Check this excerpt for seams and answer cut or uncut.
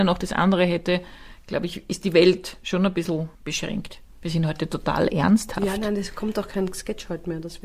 cut